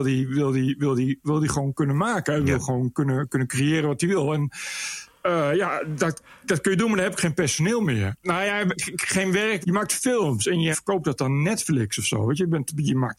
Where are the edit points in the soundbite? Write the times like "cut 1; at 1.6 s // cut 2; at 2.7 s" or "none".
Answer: cut 1; at 8.2 s // cut 2; at 9.6 s // cut 3; at 10.7 s